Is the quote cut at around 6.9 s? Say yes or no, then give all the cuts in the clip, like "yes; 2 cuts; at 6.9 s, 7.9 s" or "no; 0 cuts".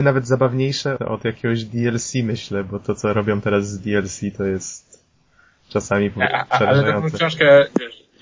no; 1 cut; at 1.0 s